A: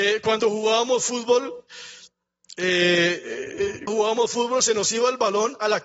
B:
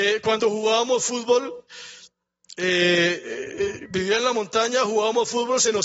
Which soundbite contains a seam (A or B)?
A